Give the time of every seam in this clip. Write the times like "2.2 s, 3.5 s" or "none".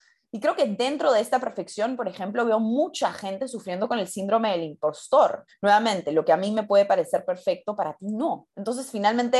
5.5 s